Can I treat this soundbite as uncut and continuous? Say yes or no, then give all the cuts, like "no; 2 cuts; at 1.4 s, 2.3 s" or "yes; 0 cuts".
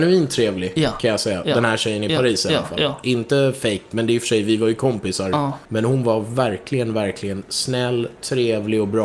no; 1 cut; at 5.7 s